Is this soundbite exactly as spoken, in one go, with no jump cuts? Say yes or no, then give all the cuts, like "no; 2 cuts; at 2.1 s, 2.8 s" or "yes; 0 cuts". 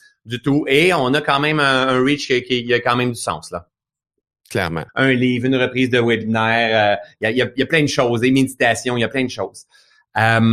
no; 1 cut; at 4.9 s